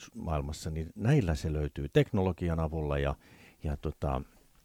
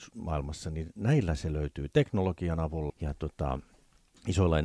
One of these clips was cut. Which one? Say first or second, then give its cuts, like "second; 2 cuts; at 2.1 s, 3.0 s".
second; 1 cut; at 2.9 s